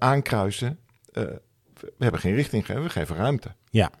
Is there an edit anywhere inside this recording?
no; 0 cuts

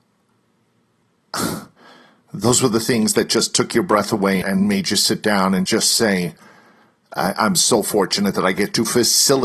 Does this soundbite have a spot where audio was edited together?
yes; 2 cuts; at 4.4 s, 5.7 s

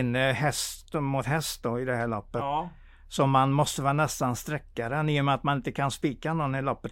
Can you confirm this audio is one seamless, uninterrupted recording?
yes; 0 cuts

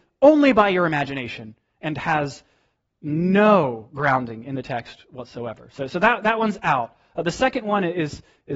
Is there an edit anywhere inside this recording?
no; 0 cuts

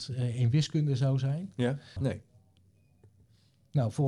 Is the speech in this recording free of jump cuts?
no; 1 cut; at 2.0 s

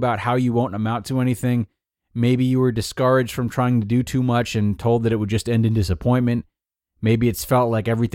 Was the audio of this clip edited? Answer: no; 0 cuts

